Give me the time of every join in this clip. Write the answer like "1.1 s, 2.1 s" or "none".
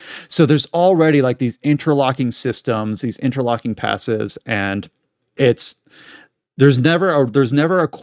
none